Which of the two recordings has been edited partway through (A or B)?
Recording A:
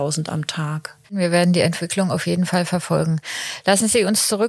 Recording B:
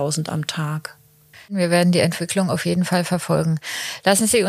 A